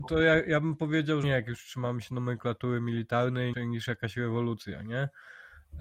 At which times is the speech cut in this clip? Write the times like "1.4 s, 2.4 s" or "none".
1.2 s, 3.5 s